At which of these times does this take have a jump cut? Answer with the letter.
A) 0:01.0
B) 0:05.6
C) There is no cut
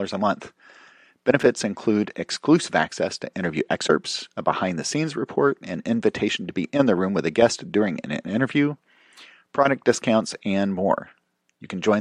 C